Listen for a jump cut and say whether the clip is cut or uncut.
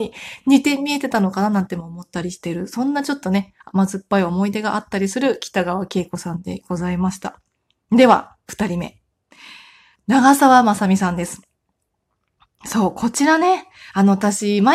uncut